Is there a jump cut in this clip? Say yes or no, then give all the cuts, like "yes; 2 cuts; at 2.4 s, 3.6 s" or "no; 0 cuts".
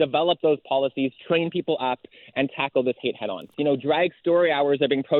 yes; 1 cut; at 3.5 s